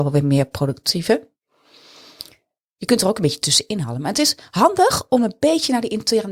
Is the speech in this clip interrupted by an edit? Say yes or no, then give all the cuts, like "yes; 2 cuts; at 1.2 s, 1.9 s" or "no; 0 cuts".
no; 0 cuts